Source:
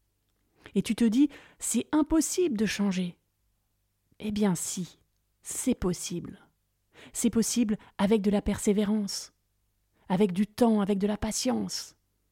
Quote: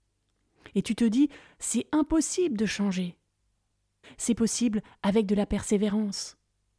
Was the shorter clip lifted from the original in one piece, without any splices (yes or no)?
no